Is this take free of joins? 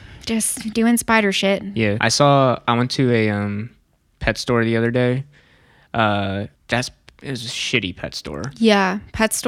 no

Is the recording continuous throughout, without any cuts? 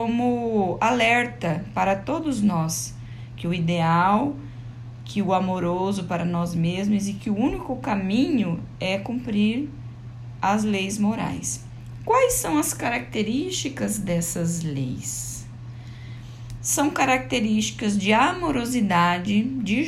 no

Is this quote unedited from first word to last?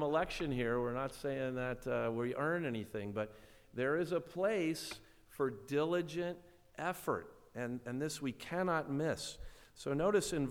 yes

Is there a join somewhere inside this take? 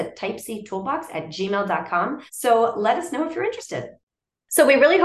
yes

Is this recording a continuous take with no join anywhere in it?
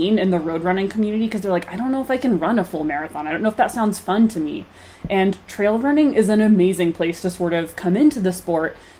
yes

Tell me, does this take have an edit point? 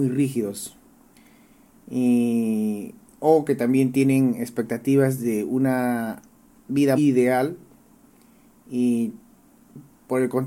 yes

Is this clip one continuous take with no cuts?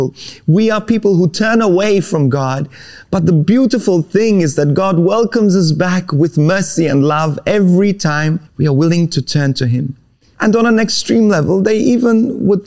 no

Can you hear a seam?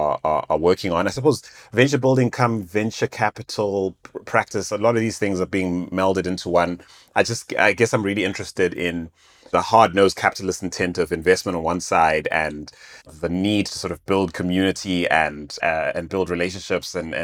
no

